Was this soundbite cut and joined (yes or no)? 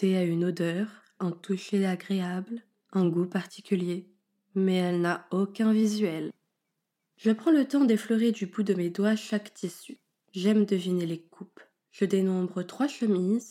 no